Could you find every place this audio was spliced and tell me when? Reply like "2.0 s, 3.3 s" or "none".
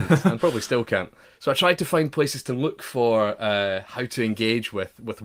1.2 s